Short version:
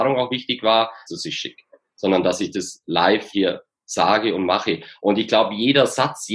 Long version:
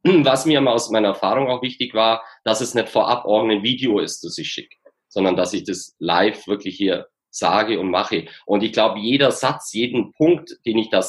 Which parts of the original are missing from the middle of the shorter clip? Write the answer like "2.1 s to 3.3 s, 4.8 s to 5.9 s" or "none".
2.4 s to 4.2 s, 6.5 s to 6.8 s